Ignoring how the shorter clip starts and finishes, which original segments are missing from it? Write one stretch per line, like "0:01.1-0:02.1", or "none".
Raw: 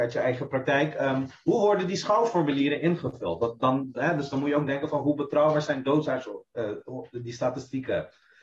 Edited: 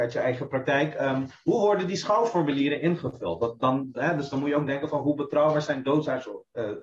none